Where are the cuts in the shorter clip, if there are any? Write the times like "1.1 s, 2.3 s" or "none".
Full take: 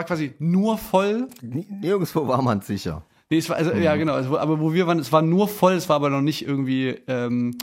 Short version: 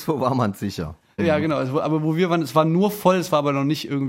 1.2 s